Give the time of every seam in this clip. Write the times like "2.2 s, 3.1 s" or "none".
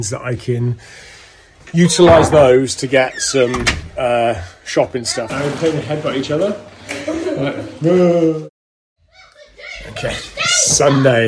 5.3 s